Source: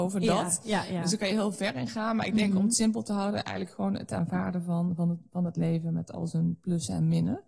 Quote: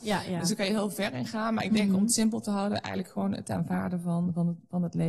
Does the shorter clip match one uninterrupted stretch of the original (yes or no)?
yes